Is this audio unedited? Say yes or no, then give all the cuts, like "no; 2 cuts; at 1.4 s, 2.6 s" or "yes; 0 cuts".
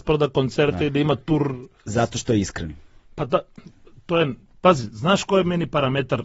yes; 0 cuts